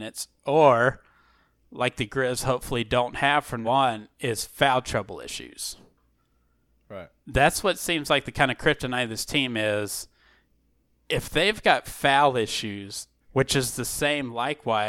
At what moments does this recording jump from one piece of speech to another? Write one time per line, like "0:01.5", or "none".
0:03.6
0:13.2